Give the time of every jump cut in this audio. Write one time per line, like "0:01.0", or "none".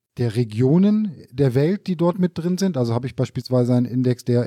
none